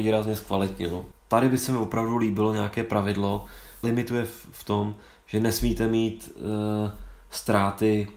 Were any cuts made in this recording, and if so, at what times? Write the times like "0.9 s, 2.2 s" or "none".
1.1 s, 3.8 s